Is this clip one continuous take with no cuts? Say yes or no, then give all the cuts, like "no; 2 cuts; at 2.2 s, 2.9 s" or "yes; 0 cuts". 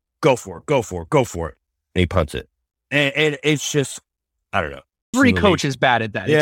no; 1 cut; at 5.1 s